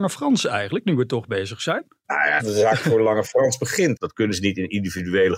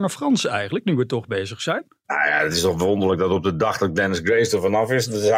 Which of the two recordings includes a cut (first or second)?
first